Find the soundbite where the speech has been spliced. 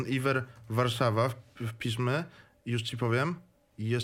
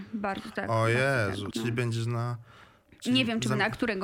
second; 1 cut; at 1.5 s

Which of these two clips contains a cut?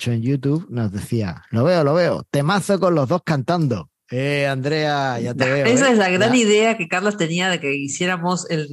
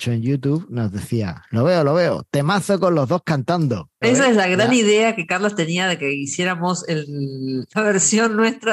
second; 2 cuts; at 4.0 s, 7.7 s

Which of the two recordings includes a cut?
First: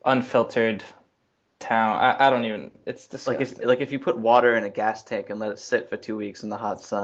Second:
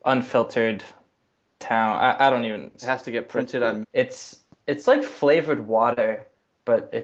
second; 2 cuts; at 2.8 s, 3.8 s

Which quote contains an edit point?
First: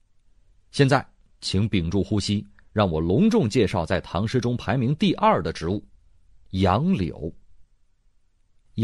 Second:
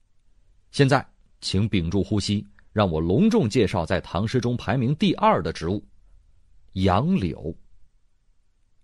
first; 1 cut; at 5.9 s

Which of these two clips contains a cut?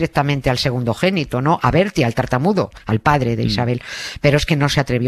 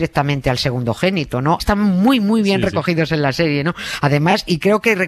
second; 1 cut; at 1.6 s

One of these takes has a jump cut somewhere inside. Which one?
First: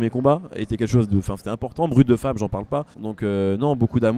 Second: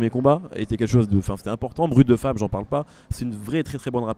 first; 1 cut; at 2.9 s

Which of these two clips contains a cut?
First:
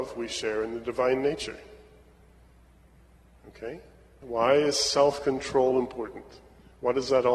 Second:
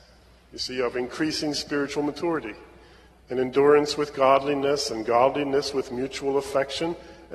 first; 1 cut; at 4.2 s

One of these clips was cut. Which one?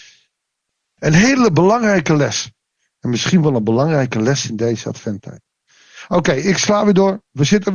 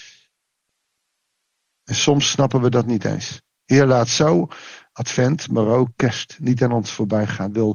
first; 1 cut; at 1.0 s

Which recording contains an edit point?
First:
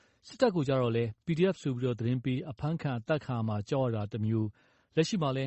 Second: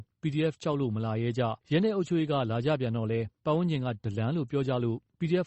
second; 1 cut; at 1.6 s

